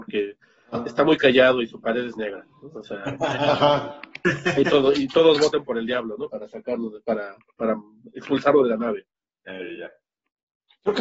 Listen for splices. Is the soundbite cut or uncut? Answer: uncut